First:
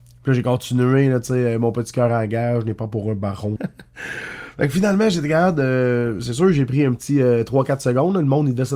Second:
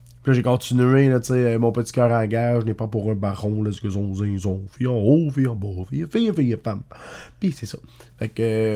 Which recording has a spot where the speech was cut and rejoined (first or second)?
first